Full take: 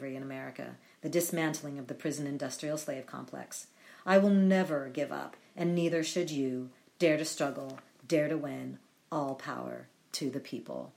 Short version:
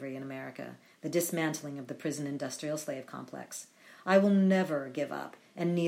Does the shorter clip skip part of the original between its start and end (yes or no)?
no